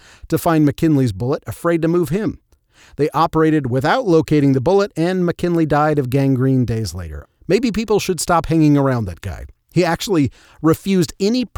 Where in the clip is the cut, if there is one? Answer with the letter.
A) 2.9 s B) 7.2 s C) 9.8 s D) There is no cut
B